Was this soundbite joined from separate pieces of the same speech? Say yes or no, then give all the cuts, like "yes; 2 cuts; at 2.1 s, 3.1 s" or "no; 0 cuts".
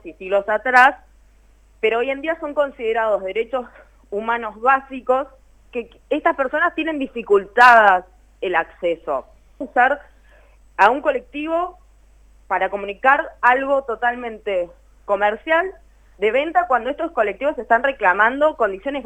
yes; 1 cut; at 9.6 s